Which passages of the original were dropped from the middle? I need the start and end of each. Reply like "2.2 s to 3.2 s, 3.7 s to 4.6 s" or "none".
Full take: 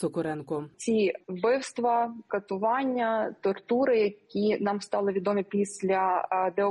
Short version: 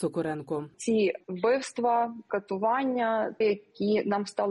3.4 s to 3.9 s